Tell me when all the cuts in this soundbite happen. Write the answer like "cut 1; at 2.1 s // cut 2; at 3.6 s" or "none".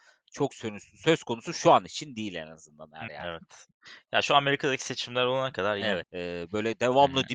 cut 1; at 3.1 s // cut 2; at 6.0 s